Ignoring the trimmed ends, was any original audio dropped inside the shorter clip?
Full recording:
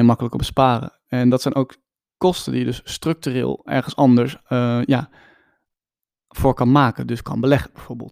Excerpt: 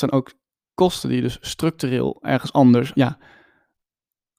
yes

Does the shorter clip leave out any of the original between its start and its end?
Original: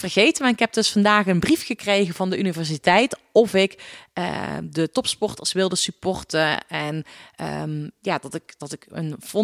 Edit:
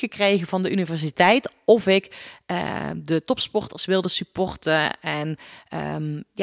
no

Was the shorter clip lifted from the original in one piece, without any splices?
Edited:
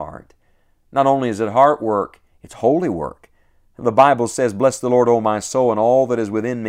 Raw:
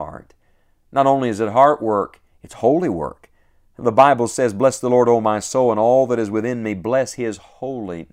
yes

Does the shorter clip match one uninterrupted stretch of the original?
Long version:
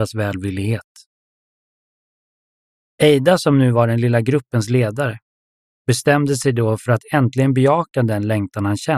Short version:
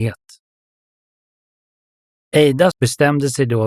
no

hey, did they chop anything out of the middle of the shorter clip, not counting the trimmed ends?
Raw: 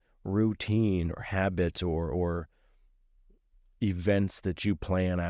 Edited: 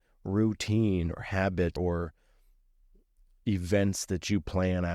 yes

